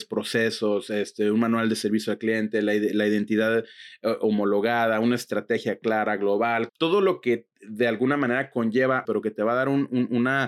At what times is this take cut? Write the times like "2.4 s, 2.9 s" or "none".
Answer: 6.7 s, 9.0 s